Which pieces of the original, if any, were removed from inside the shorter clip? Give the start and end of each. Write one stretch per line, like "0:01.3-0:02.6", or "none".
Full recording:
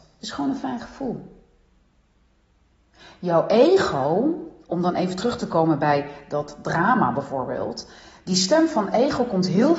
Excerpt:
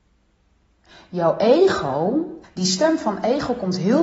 0:04.5-0:08.1